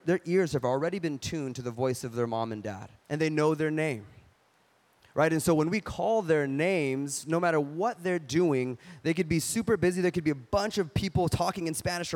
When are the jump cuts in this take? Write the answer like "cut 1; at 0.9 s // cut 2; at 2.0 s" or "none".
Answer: cut 1; at 3.0 s

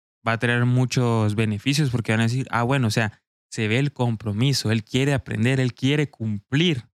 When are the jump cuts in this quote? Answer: cut 1; at 3.4 s

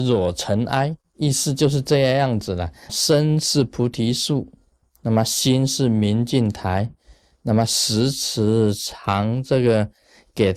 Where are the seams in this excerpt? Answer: cut 1; at 2.9 s

